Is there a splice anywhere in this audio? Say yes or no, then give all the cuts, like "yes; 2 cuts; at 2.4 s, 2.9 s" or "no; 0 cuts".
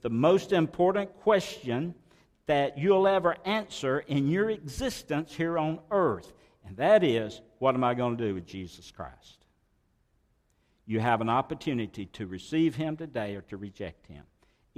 no; 0 cuts